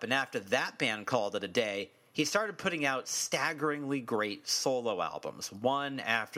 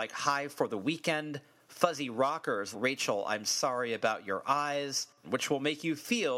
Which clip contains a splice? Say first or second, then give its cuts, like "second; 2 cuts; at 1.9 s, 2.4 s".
second; 2 cuts; at 2.7 s, 5.2 s